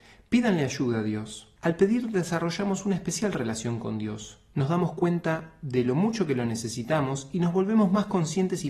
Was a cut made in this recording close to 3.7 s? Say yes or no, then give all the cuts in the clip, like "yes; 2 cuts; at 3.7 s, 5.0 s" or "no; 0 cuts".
no; 1 cut; at 1.6 s